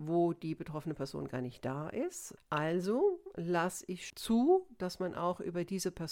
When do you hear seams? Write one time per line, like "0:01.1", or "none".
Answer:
0:02.4
0:04.1